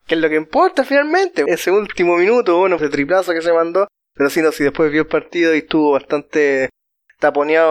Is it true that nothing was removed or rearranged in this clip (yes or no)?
no